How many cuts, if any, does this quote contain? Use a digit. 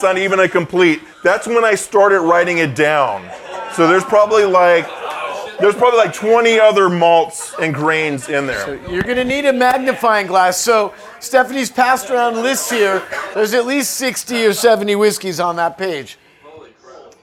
1